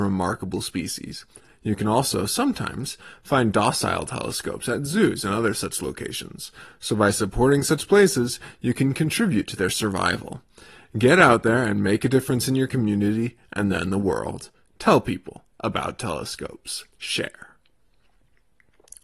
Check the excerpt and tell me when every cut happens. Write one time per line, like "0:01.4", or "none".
0:16.9